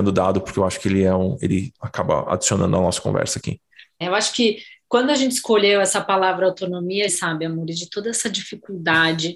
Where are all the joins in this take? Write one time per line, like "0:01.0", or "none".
0:04.0
0:07.1